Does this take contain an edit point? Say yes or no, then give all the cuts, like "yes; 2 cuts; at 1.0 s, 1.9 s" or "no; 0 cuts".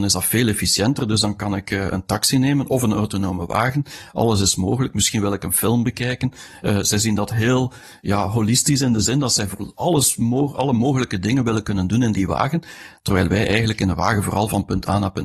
no; 0 cuts